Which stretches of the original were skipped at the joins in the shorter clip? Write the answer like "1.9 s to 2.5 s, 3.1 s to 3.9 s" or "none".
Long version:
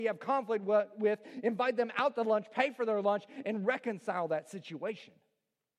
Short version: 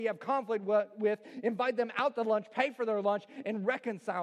none